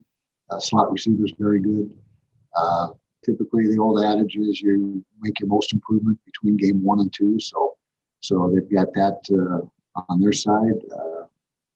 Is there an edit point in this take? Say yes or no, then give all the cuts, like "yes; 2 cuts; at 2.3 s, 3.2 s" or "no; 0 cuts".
yes; 1 cut; at 3.2 s